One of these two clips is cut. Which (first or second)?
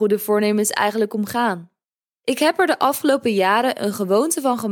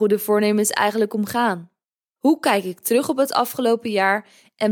second